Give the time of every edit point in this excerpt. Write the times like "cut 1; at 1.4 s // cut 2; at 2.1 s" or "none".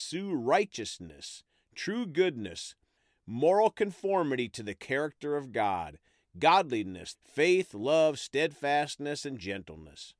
cut 1; at 7.1 s